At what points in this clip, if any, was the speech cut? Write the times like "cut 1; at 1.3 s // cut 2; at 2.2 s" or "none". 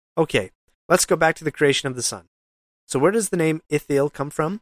cut 1; at 2.8 s